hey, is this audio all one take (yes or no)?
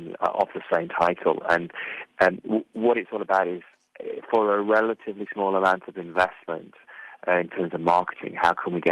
yes